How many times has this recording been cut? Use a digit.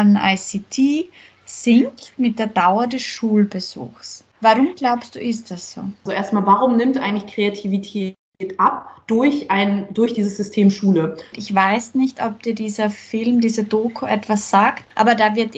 2